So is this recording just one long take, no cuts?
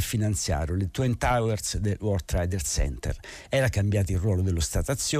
yes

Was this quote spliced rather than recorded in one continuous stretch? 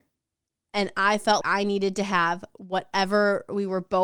yes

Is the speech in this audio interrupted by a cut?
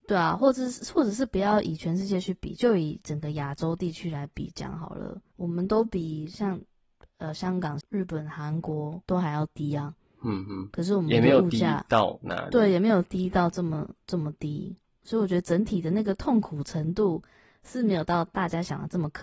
yes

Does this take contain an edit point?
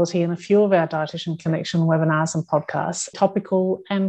yes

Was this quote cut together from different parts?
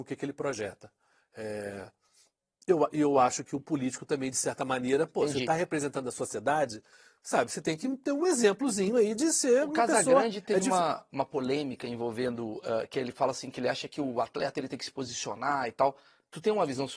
no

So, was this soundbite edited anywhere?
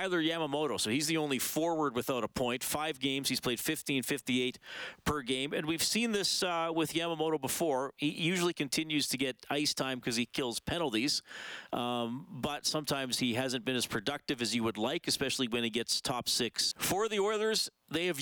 yes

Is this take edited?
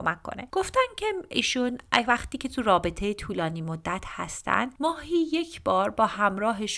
no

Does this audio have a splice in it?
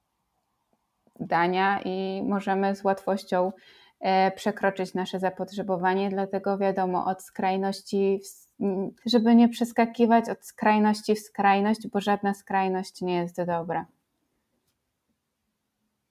yes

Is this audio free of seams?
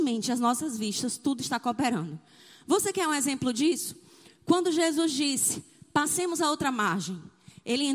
yes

